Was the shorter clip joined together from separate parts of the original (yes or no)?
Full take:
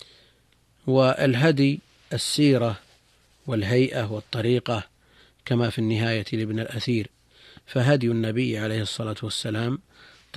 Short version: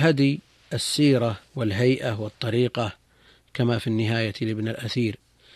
yes